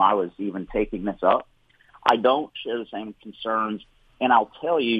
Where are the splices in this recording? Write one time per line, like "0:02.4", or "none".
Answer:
0:01.9

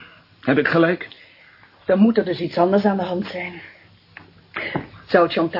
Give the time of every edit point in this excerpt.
none

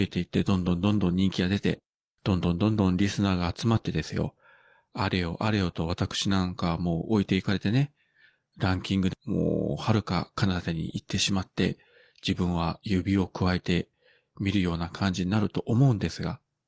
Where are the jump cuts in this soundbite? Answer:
0:09.1

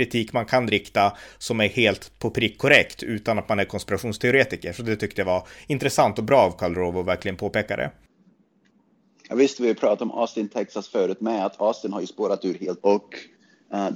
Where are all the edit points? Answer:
0:12.8

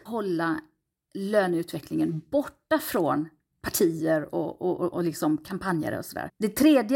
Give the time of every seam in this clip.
0:04.9

